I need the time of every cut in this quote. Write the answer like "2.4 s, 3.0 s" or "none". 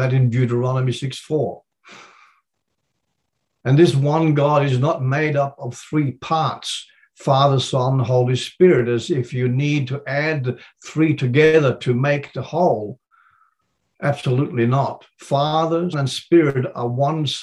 15.9 s